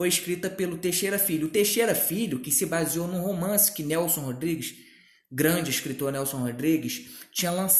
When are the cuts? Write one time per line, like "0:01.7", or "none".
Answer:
none